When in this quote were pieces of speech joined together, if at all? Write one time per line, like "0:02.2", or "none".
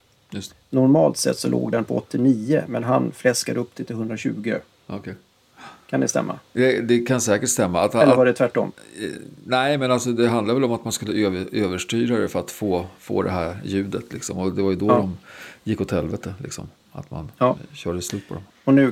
none